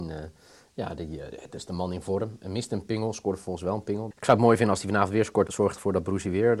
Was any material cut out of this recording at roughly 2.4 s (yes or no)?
no